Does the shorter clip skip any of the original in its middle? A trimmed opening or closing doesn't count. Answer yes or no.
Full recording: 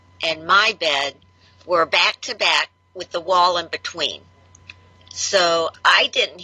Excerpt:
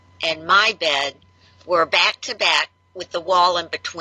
no